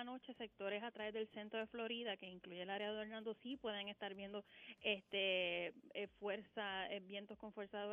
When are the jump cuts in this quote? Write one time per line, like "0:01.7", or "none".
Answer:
none